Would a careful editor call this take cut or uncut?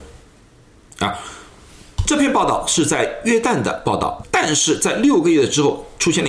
cut